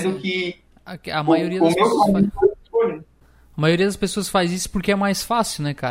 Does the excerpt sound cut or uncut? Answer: uncut